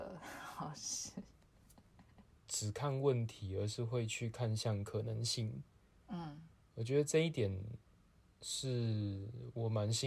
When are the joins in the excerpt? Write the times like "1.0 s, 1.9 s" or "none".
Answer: 2.4 s